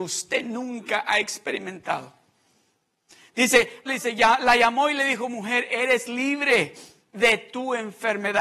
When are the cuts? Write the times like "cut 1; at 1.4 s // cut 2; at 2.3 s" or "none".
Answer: cut 1; at 3.9 s

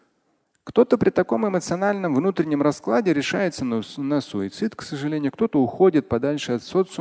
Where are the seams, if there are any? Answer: none

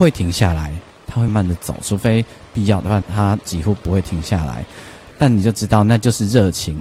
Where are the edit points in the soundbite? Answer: cut 1; at 1.3 s // cut 2; at 3.0 s // cut 3; at 5.1 s

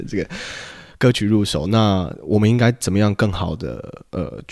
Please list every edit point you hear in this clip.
none

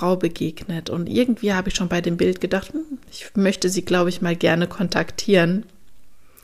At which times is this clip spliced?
none

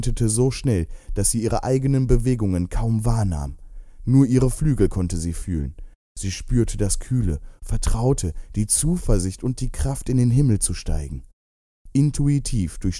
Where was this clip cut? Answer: cut 1; at 11.9 s

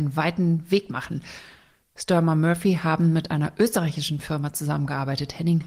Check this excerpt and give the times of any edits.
none

